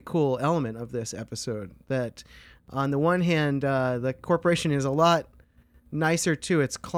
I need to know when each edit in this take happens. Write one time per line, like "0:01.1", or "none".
none